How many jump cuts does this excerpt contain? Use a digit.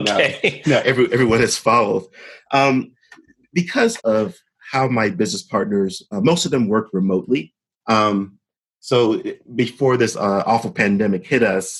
2